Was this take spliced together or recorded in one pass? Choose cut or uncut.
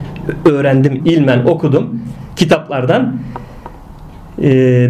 cut